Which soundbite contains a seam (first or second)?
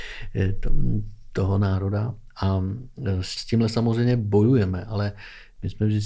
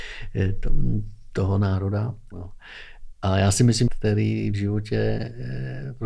second